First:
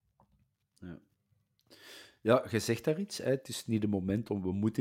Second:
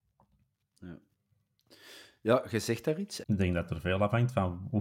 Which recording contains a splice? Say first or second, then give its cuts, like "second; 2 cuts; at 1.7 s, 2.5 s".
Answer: second; 1 cut; at 3.2 s